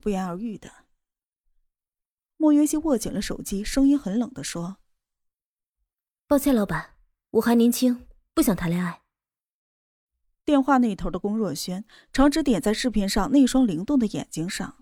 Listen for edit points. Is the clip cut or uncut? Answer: uncut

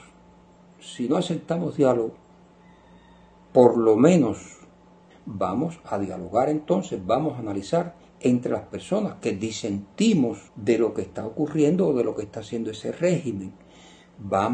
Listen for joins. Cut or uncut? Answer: cut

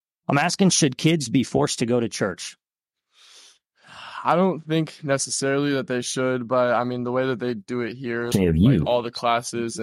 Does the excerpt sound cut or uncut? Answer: cut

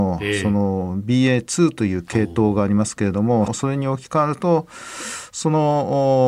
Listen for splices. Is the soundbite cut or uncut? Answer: cut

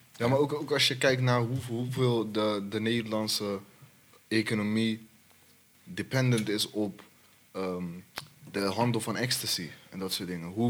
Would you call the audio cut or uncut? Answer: cut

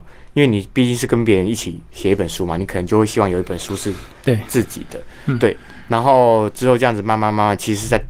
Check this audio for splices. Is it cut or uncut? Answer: uncut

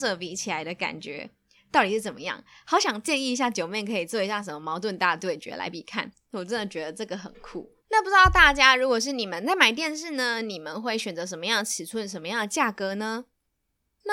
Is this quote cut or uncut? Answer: cut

